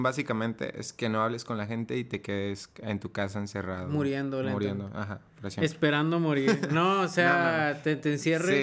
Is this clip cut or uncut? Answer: uncut